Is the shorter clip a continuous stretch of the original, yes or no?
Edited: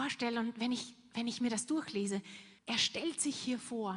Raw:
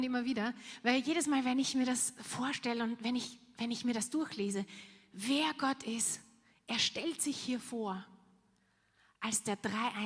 no